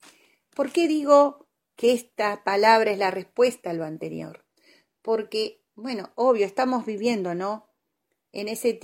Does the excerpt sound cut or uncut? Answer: uncut